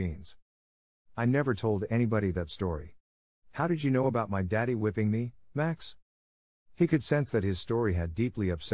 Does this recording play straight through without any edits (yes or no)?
no